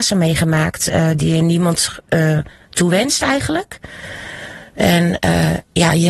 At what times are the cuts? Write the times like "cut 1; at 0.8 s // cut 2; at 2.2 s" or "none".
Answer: none